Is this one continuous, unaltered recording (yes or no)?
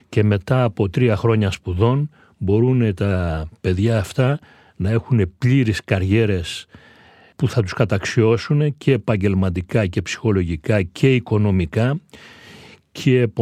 yes